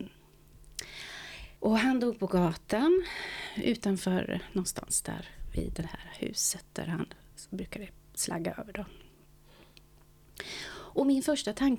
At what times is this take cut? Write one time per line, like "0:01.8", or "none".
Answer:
0:01.6